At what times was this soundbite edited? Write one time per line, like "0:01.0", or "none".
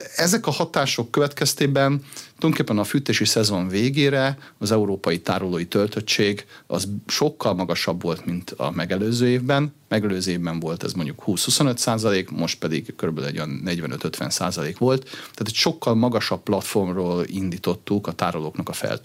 none